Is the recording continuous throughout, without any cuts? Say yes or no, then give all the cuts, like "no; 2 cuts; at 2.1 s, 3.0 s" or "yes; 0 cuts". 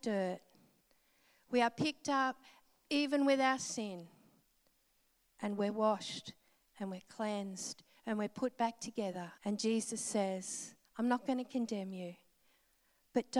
no; 2 cuts; at 9.4 s, 10.8 s